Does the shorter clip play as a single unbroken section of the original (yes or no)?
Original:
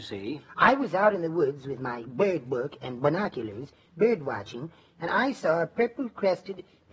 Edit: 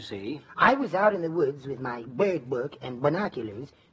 yes